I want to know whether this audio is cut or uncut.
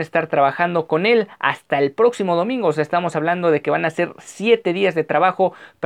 uncut